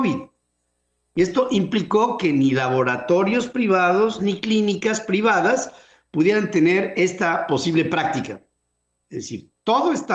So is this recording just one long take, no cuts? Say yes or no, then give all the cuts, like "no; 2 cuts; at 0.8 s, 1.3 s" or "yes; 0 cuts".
no; 1 cut; at 4.2 s